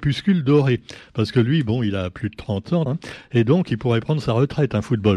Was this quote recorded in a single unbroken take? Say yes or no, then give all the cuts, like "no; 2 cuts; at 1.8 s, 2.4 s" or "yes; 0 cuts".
no; 1 cut; at 2.9 s